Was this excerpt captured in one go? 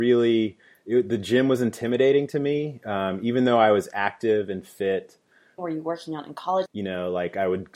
no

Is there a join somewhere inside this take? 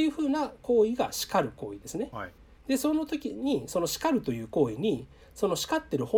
yes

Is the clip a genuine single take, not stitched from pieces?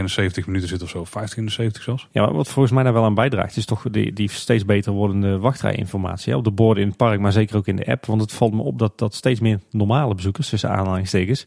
yes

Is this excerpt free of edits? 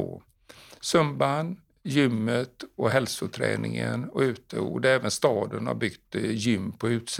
yes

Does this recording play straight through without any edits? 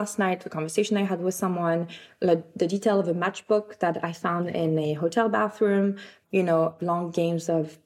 no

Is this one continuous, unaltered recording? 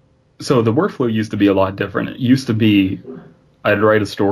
yes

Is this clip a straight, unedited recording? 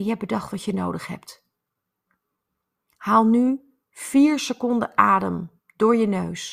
yes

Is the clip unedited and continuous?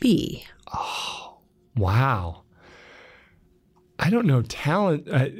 yes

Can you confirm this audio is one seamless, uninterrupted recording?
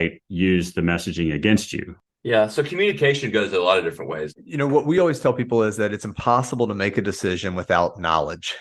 no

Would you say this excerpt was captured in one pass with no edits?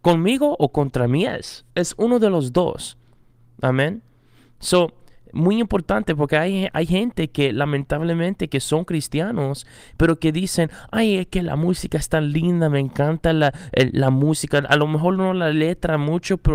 no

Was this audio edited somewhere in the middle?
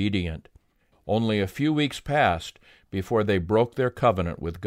yes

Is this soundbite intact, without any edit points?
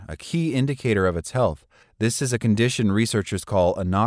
no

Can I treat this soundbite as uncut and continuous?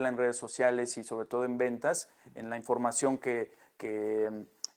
yes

